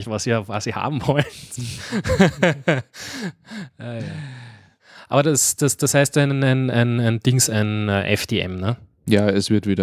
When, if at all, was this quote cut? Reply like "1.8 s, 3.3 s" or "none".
none